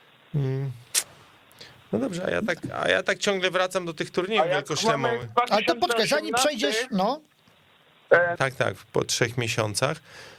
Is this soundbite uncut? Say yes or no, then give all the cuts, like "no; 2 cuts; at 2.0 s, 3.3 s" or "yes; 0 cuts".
no; 1 cut; at 8.4 s